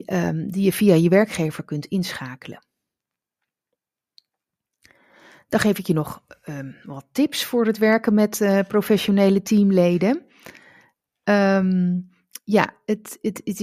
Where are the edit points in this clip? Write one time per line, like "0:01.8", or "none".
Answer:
none